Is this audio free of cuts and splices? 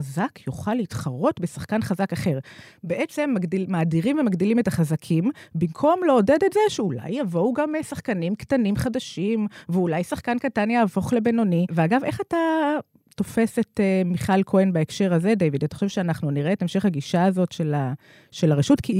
yes; 0 cuts

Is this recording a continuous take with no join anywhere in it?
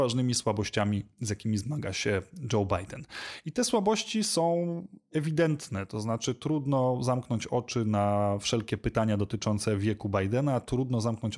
yes; 0 cuts

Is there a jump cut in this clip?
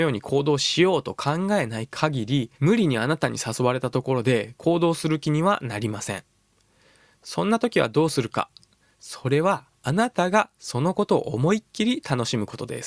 yes; 1 cut; at 2.5 s

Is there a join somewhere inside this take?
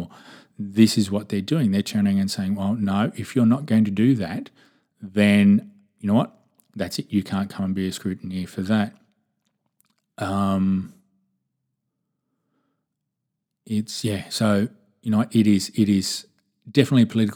no; 0 cuts

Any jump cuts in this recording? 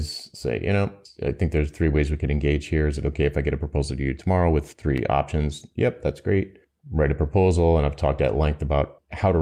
no; 0 cuts

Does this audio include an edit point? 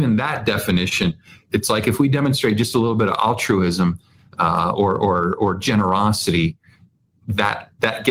no; 0 cuts

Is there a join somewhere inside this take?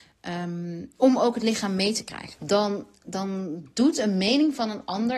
yes; 1 cut; at 2.3 s

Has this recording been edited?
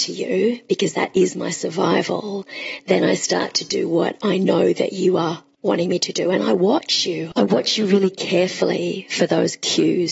no; 0 cuts

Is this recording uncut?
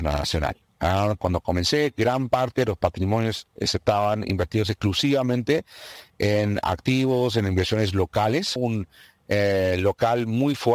no; 1 cut; at 8.6 s

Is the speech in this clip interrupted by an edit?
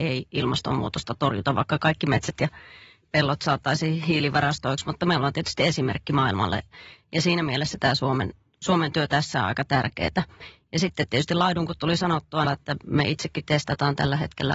yes; 2 cuts; at 7.0 s, 12.4 s

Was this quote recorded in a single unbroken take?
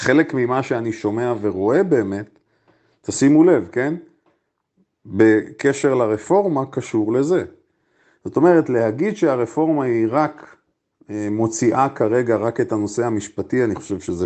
yes; 0 cuts

